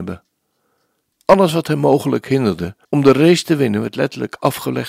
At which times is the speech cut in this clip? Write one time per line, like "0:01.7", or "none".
0:01.1
0:02.8

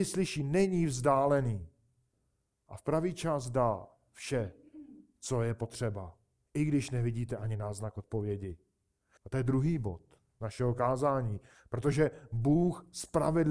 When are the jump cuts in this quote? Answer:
0:06.5
0:09.2
0:11.5

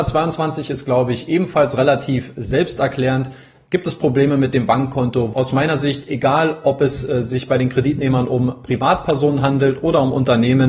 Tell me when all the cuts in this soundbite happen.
0:05.3

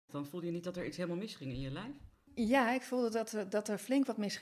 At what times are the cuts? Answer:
none

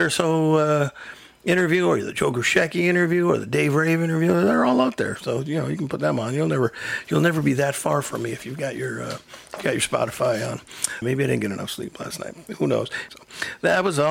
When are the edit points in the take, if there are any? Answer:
0:11.0
0:13.1

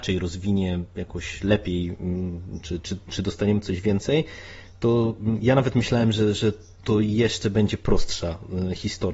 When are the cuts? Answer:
none

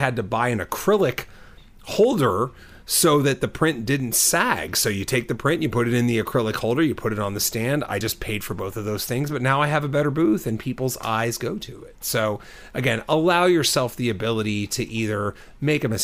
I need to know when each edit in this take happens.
none

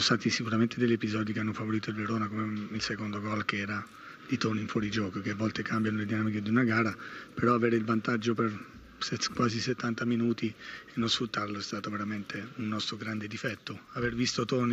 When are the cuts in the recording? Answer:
none

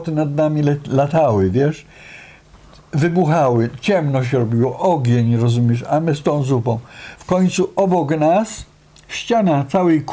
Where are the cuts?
none

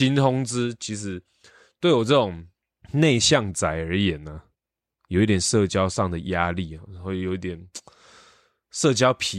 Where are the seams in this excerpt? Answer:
none

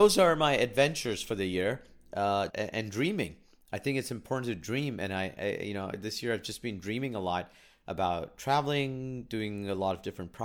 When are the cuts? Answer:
0:02.5

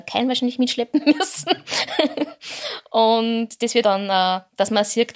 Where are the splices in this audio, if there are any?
0:03.8

